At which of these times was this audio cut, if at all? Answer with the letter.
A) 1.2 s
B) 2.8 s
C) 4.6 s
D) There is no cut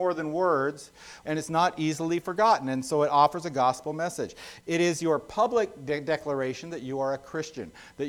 A